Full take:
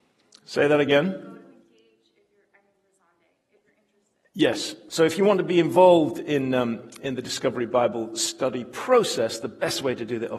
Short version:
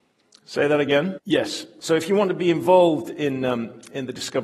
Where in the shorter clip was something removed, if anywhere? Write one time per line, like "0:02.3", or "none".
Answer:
0:01.2

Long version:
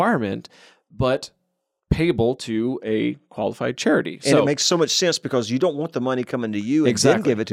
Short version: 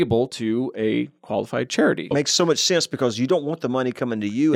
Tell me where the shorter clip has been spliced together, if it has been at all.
0:02.1

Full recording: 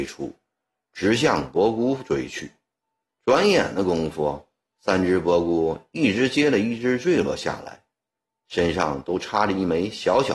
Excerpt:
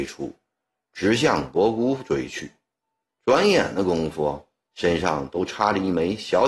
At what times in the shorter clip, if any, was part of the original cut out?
0:04.7

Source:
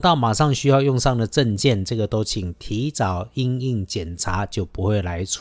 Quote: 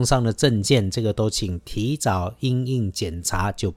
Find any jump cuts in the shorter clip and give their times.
none

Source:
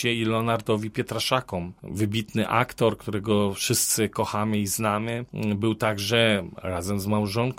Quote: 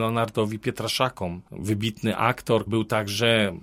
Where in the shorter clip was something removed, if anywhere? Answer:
0:02.7

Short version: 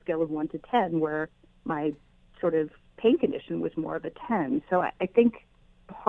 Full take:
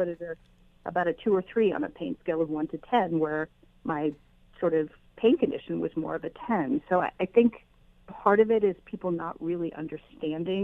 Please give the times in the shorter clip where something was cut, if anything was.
none

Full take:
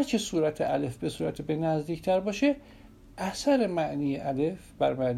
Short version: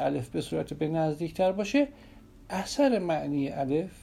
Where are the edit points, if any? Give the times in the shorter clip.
none

